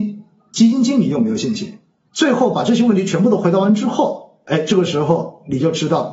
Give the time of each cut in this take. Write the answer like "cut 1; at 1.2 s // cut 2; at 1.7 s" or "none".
cut 1; at 2.1 s